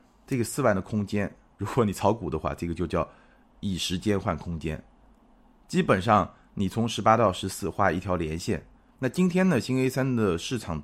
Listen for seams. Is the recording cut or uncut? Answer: cut